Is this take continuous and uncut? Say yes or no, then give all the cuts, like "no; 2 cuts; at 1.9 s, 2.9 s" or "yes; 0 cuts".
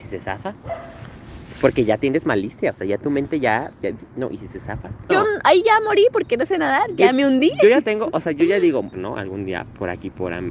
no; 2 cuts; at 5.1 s, 8.9 s